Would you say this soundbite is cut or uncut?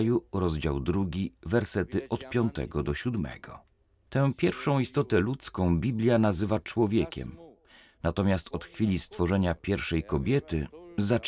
uncut